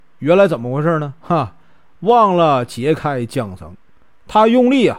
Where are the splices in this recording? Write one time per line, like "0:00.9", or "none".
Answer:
none